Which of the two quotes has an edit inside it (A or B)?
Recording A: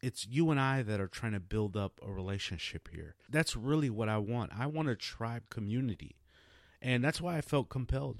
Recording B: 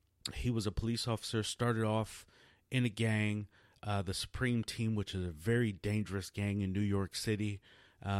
A